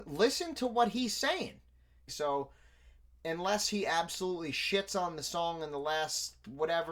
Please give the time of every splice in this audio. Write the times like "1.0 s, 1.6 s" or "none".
2.1 s